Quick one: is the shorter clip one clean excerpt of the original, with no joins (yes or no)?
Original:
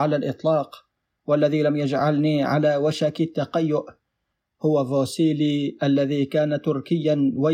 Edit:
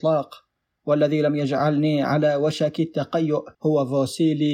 no